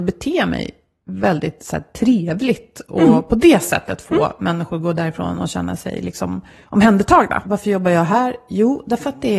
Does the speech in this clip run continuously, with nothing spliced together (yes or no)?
no